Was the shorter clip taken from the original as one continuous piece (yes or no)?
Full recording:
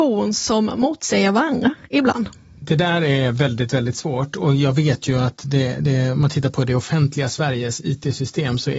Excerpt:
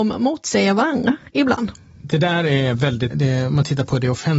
no